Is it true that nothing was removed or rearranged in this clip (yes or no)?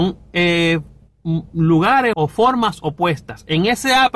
no